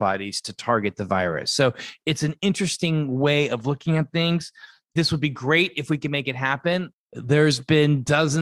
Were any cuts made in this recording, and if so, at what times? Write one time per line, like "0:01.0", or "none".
none